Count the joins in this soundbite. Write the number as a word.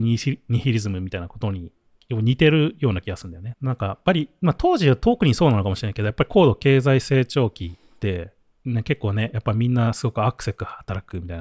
one